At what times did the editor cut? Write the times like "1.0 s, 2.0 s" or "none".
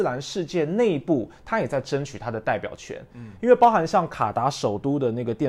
none